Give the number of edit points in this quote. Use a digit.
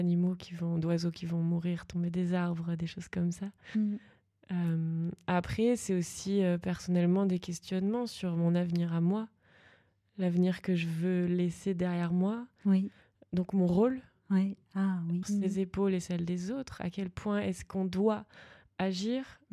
1